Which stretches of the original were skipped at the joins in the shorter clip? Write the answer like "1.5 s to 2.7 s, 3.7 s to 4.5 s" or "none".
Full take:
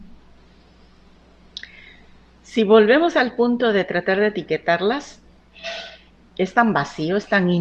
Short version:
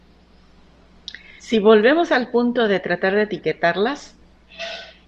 1.9 s to 2.4 s